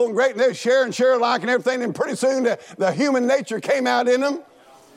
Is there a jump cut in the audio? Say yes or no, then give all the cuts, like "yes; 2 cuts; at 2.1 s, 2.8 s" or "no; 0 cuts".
no; 0 cuts